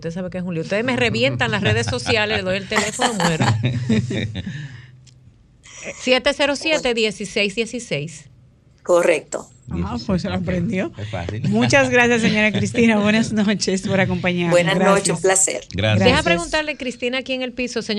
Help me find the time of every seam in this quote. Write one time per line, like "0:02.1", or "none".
none